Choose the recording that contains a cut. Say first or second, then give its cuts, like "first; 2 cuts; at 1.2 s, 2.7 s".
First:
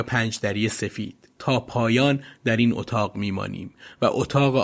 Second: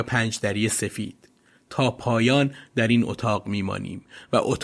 first; 1 cut; at 1.3 s